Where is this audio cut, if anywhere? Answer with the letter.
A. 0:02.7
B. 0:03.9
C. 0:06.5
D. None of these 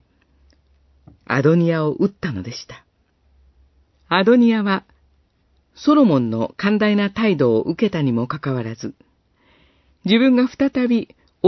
B